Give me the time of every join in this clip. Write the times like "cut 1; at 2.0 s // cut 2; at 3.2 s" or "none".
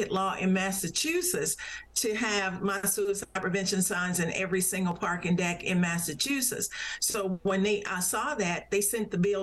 none

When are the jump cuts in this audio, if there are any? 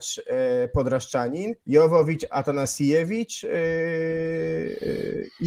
cut 1; at 1.6 s

